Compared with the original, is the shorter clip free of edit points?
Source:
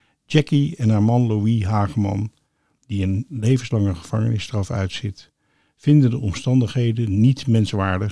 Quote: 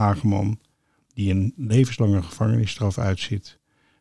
yes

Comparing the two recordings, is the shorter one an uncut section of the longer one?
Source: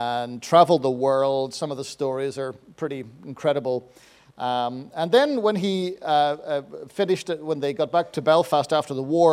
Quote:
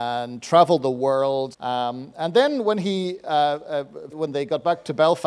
no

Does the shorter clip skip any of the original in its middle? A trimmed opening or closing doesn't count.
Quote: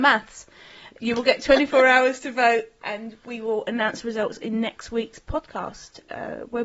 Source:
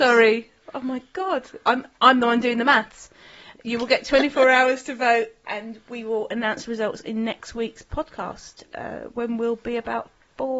no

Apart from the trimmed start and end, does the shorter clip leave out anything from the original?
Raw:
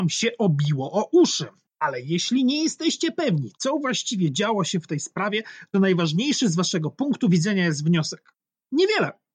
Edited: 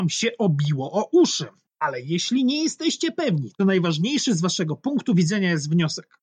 yes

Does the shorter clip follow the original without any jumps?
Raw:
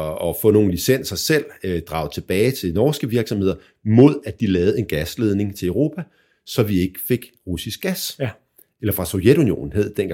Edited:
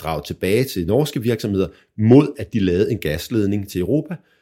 yes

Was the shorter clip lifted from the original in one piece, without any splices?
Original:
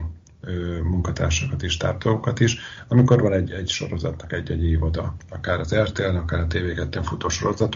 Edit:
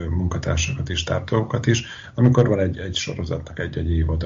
yes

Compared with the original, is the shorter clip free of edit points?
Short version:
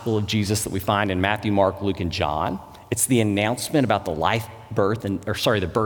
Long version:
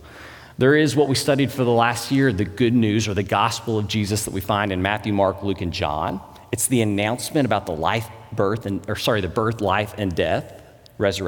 yes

